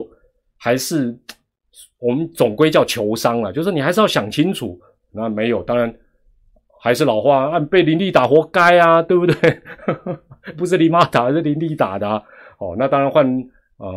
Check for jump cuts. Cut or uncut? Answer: cut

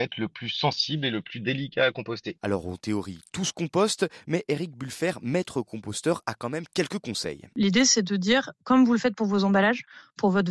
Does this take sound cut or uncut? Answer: cut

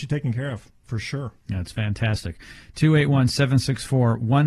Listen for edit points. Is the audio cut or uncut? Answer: cut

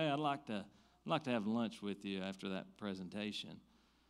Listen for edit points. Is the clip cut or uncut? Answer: uncut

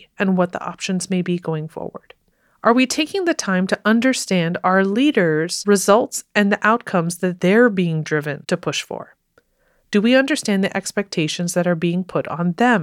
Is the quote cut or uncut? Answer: uncut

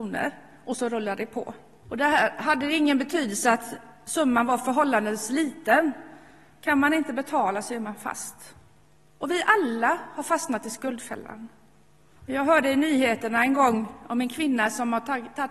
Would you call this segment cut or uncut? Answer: cut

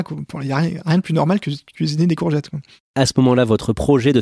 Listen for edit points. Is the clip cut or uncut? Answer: uncut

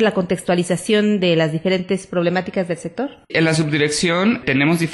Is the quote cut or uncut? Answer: cut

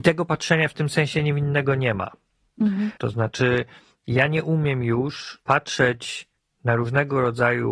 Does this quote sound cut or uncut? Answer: cut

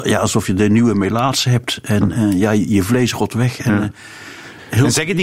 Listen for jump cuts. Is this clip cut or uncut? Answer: uncut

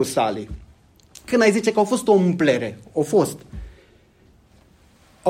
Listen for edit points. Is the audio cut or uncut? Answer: uncut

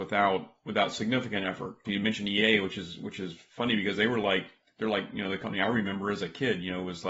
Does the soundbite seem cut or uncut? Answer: cut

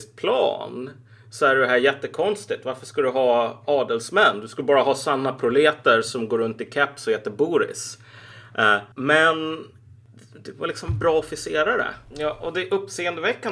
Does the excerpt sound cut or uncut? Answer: cut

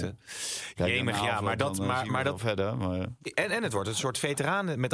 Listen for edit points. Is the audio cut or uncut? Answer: uncut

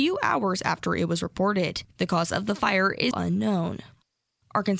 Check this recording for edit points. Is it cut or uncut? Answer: cut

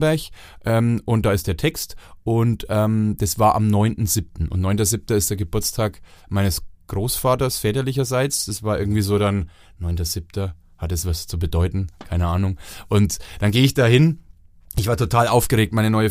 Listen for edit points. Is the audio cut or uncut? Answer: uncut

